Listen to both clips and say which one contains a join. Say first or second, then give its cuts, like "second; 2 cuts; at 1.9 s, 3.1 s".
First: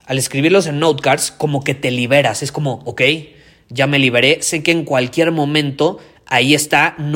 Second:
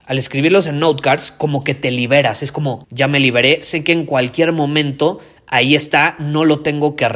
second; 1 cut; at 2.8 s